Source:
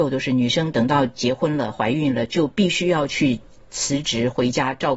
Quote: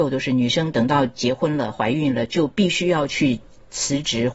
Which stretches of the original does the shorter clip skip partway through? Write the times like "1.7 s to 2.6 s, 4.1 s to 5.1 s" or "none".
none